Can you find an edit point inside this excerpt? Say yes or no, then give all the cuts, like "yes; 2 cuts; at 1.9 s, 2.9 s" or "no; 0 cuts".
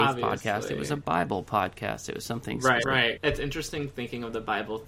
yes; 1 cut; at 2.8 s